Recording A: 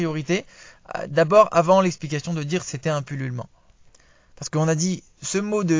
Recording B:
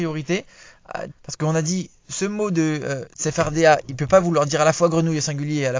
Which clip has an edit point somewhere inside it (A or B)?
B